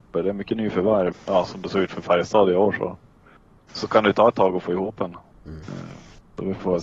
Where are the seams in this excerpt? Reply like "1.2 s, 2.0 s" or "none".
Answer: 1.1 s, 5.3 s